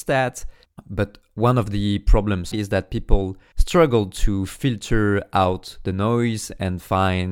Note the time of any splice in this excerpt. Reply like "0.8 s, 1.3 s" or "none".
2.5 s